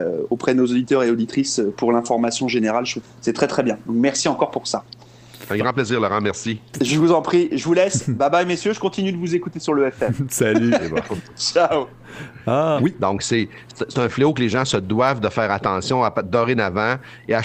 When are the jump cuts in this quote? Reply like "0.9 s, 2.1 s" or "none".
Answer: 3.0 s, 12.8 s